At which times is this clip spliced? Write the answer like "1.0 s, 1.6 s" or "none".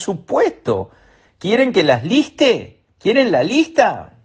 none